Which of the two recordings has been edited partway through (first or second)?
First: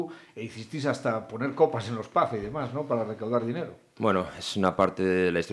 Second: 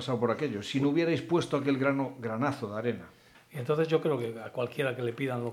second